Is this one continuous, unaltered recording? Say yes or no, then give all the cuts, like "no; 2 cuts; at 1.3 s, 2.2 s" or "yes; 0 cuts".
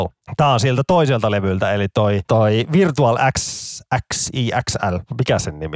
yes; 0 cuts